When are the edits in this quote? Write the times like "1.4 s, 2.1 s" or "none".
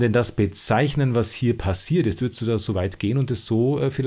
2.2 s

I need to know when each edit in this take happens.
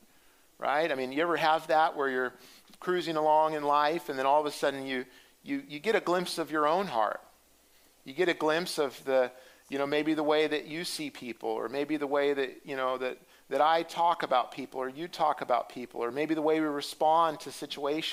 none

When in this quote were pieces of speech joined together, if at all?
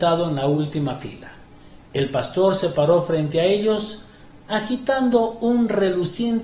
none

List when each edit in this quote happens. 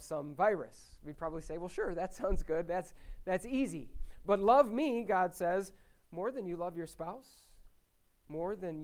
none

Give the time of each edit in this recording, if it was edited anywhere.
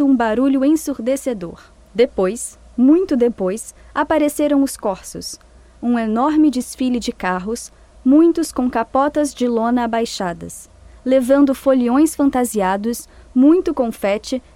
none

